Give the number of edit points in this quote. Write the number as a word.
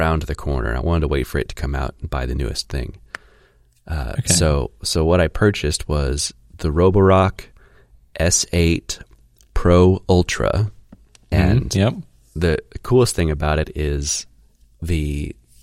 one